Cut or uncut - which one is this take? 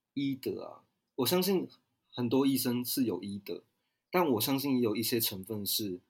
uncut